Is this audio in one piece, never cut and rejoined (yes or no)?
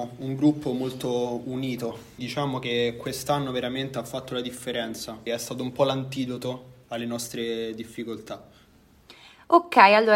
no